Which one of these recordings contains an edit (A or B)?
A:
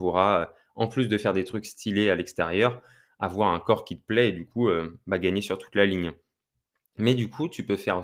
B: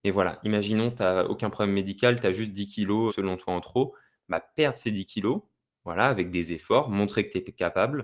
B